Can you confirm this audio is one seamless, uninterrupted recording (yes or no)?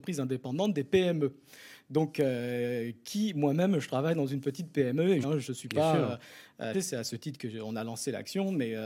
no